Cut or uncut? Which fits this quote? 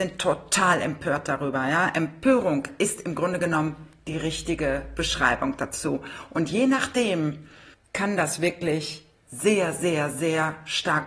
cut